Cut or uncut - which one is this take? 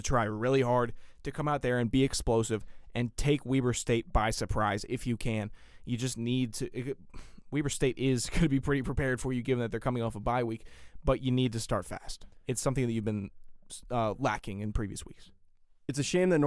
uncut